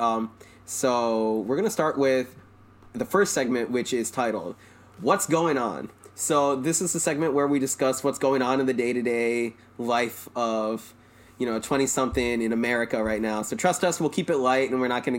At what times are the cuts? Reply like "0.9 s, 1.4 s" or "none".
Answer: none